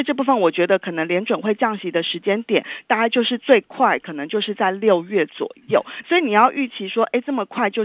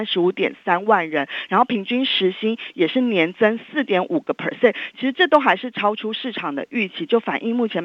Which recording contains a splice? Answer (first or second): first